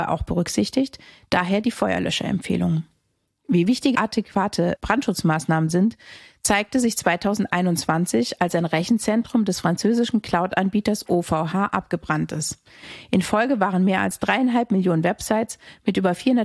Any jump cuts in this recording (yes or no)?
no